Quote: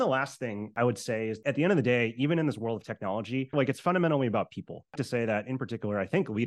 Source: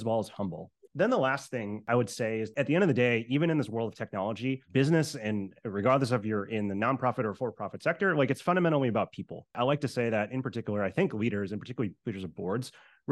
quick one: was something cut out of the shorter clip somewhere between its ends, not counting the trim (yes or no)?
yes